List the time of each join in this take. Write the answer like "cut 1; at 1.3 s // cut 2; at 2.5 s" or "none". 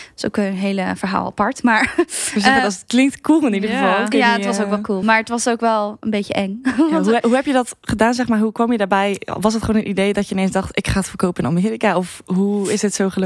none

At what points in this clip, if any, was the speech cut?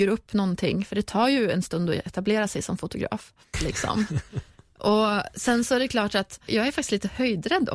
cut 1; at 3.5 s // cut 2; at 6.5 s

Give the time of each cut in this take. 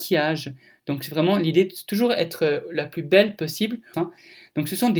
cut 1; at 3.9 s

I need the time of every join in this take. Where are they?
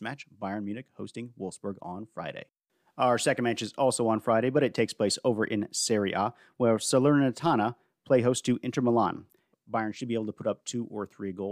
cut 1; at 9.5 s

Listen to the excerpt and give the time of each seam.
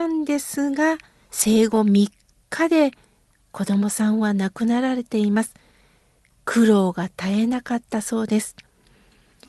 cut 1; at 1.2 s

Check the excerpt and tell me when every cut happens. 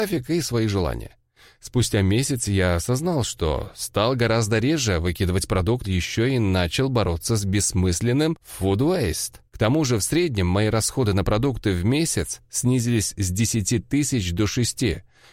cut 1; at 5.8 s // cut 2; at 9.5 s

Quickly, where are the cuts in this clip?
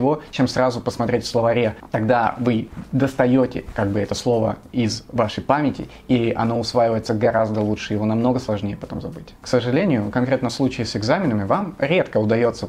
none

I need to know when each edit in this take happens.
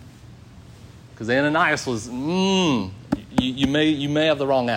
cut 1; at 1.1 s

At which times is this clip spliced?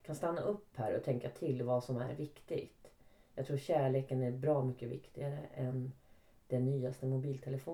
none

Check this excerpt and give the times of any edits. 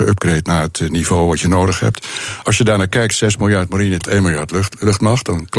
cut 1; at 2.4 s // cut 2; at 4.0 s

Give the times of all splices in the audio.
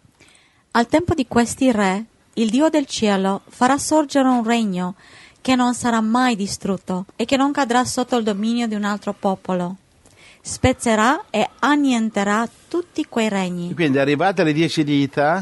cut 1; at 7.1 s

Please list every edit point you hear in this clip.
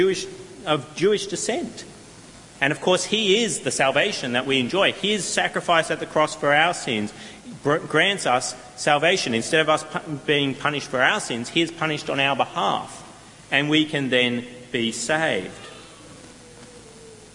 none

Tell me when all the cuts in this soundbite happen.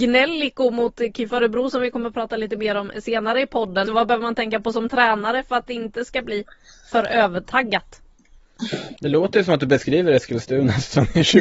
cut 1; at 3.8 s // cut 2; at 9.0 s

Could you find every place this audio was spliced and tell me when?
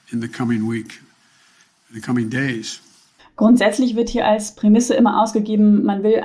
cut 1; at 3.2 s

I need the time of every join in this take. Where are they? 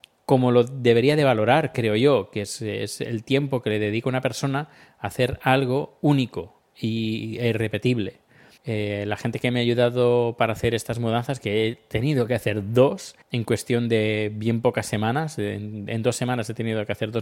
cut 1; at 8.6 s // cut 2; at 13.2 s

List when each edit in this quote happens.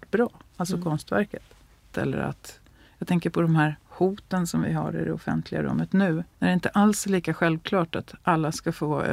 cut 1; at 1.9 s // cut 2; at 6.3 s

